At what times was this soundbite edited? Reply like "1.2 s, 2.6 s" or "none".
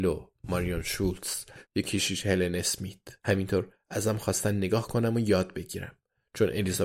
1.6 s, 3.2 s